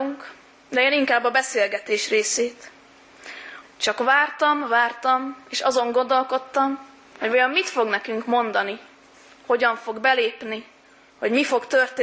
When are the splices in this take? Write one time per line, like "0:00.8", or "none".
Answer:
0:03.6